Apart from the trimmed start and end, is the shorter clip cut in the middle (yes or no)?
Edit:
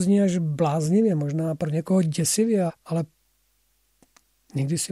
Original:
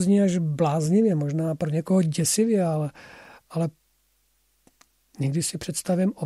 yes